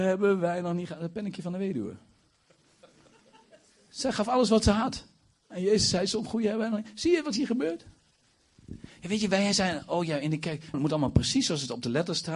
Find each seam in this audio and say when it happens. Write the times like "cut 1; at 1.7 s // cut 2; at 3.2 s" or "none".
cut 1; at 10.7 s